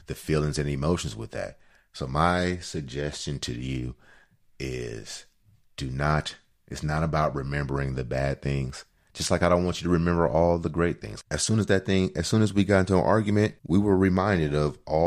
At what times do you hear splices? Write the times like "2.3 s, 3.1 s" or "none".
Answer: 11.2 s, 13.6 s